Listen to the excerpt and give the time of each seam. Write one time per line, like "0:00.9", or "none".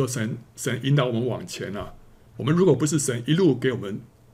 none

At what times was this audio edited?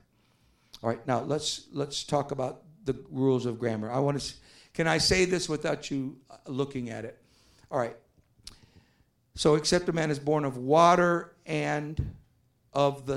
none

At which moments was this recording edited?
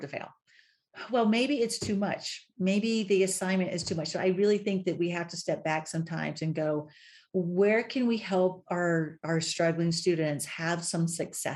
none

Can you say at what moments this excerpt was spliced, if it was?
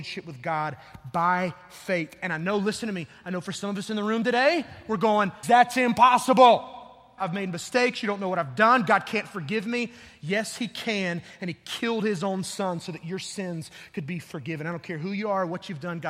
0:05.4
0:07.2

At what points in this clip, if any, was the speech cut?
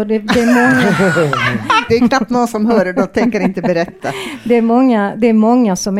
0:01.9

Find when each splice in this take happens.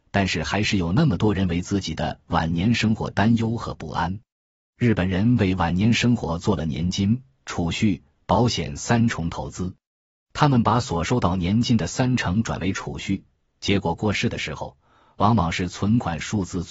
none

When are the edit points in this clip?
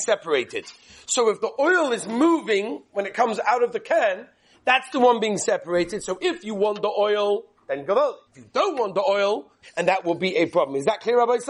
0:08.3
0:09.6

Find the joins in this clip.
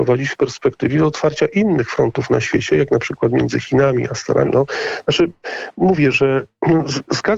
0:04.4

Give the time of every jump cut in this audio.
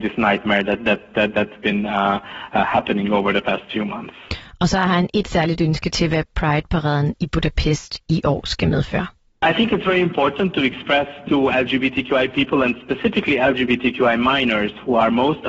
none

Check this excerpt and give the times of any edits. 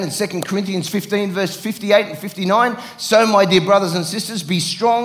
none

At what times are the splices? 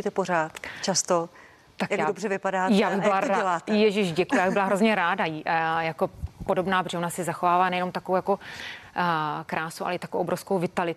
none

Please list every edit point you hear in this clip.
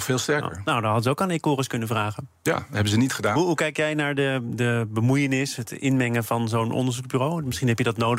none

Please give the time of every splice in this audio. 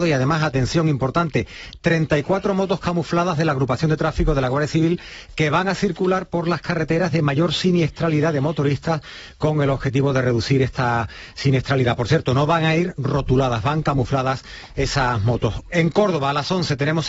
0:15.7

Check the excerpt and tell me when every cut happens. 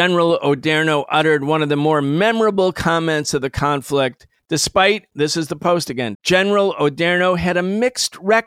0:04.4
0:06.1

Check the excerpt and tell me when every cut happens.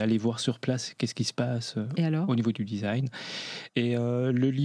0:03.7

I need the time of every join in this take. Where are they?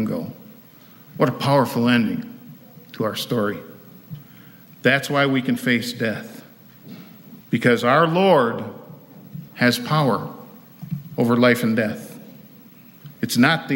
0:07.4
0:09.5

